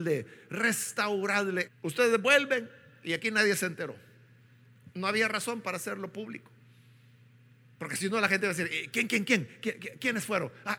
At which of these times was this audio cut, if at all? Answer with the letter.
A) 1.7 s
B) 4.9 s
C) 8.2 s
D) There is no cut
A